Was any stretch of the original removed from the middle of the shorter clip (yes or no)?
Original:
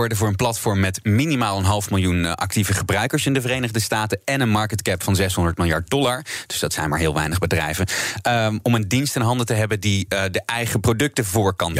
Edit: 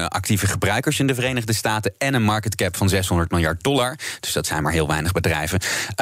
no